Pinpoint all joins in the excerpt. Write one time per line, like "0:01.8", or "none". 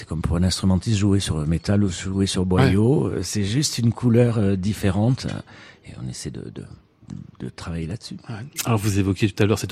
none